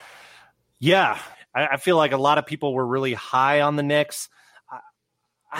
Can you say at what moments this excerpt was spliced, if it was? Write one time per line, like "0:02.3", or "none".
0:01.3